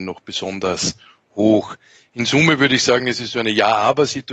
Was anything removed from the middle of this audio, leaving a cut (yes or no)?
no